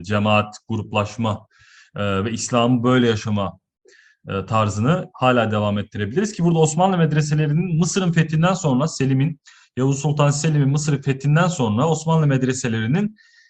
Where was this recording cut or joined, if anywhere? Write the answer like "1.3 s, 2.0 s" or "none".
none